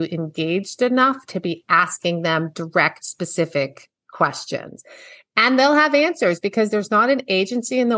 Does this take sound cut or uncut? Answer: uncut